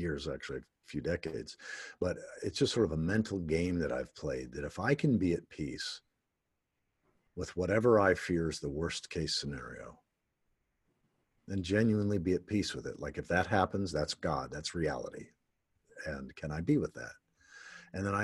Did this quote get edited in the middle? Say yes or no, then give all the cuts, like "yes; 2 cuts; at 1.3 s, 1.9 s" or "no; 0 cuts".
no; 0 cuts